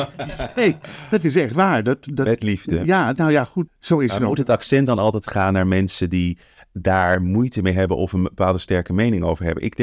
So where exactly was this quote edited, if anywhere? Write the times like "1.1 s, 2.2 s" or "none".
3.7 s